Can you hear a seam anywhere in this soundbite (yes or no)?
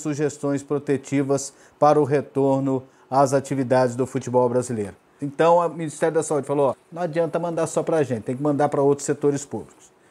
yes